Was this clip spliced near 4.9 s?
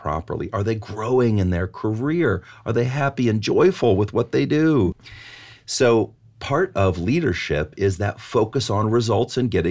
yes; 1 cut; at 4.9 s

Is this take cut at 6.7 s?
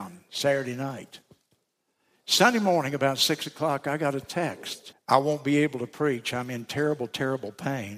no; 1 cut; at 4.9 s

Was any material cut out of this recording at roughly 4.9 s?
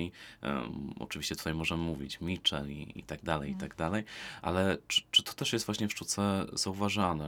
yes; 1 cut; at 4.9 s

